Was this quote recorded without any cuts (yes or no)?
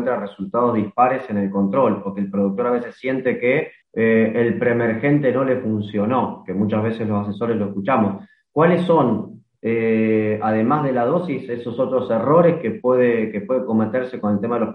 no